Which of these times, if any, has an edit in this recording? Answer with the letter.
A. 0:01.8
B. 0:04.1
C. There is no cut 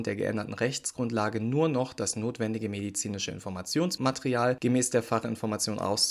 C